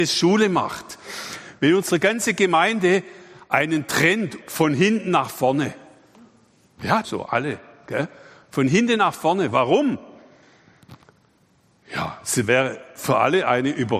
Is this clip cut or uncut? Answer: cut